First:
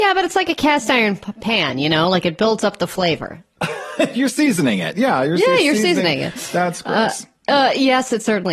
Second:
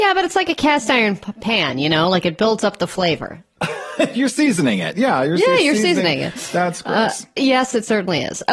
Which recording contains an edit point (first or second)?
second